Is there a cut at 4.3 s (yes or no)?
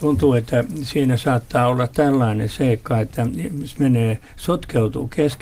no